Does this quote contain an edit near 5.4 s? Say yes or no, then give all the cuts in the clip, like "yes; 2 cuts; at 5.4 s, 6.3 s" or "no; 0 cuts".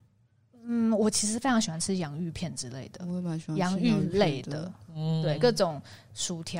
no; 0 cuts